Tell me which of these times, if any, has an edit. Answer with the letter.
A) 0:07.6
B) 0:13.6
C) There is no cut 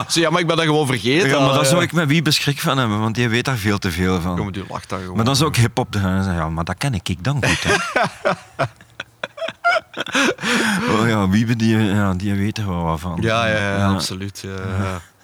B